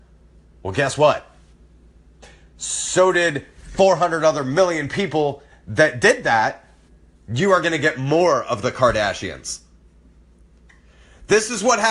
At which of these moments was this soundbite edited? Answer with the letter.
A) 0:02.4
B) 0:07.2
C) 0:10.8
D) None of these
B